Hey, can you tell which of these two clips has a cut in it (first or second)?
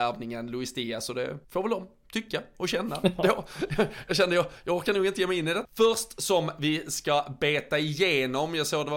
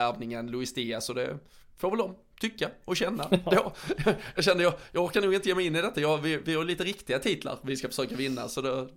first